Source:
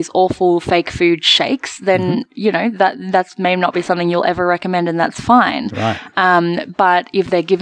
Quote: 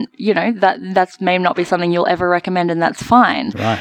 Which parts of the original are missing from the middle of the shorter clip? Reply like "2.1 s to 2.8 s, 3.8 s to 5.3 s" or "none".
none